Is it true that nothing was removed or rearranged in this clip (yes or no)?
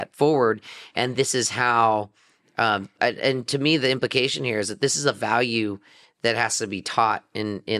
no